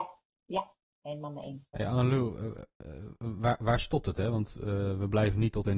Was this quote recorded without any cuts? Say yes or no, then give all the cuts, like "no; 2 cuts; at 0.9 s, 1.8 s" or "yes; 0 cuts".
no; 1 cut; at 1.7 s